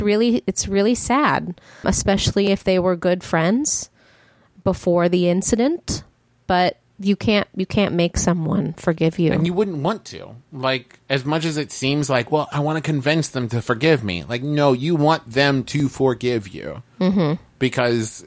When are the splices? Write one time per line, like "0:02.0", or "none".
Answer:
0:01.8